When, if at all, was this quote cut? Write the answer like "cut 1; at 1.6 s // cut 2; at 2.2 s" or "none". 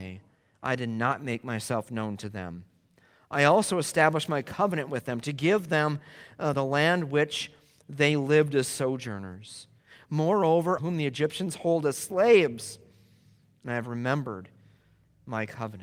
cut 1; at 6.5 s // cut 2; at 10.8 s